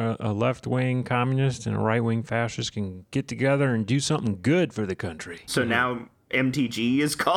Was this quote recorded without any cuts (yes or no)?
no